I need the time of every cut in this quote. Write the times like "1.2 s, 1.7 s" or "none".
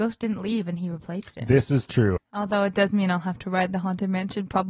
2.2 s